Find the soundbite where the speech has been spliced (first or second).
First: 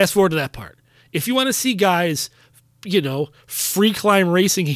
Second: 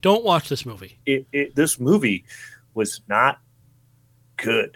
second